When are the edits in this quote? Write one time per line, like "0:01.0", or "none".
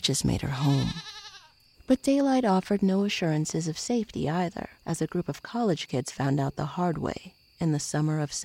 0:01.7